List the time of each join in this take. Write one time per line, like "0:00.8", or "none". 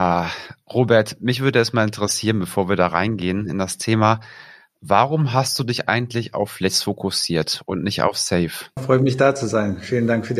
0:08.8